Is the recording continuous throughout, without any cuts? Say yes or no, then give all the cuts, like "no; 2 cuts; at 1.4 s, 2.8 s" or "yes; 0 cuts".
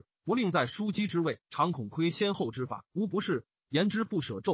no; 2 cuts; at 1.4 s, 2.9 s